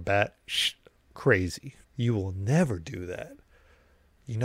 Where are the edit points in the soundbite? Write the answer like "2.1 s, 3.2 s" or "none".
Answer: 1.8 s